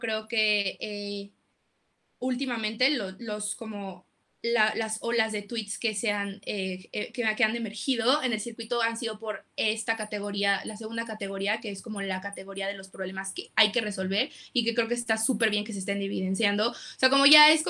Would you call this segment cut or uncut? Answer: uncut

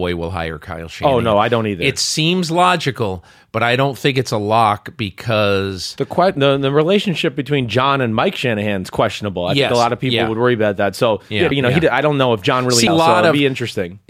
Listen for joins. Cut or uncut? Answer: cut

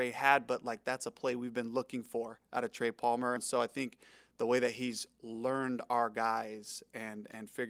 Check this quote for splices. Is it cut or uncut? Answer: cut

